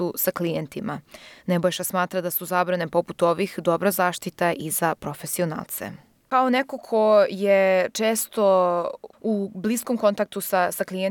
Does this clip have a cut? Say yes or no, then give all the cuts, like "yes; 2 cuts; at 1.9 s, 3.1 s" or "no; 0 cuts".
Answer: no; 0 cuts